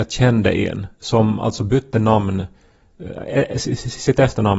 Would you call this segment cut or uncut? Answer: uncut